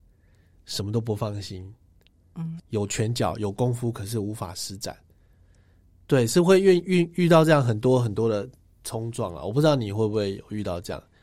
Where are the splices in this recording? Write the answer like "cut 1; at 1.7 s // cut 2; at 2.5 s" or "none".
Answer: cut 1; at 2.6 s